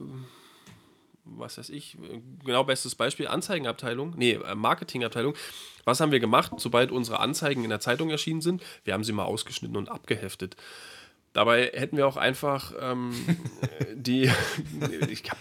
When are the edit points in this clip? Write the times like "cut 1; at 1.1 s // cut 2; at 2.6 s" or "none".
none